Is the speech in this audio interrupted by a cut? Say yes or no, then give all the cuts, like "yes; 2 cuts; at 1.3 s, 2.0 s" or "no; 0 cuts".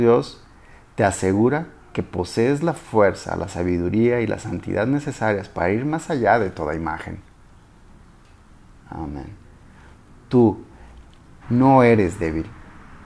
yes; 1 cut; at 11.4 s